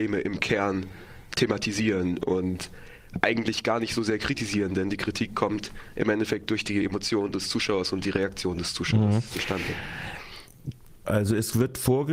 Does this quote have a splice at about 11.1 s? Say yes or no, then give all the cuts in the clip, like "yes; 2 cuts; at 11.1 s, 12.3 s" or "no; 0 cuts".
yes; 1 cut; at 11.1 s